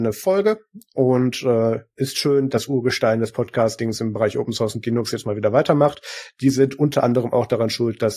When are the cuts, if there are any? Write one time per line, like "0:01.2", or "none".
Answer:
0:02.5